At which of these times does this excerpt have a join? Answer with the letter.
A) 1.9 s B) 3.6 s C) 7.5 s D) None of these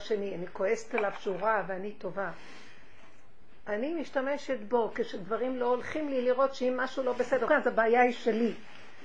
C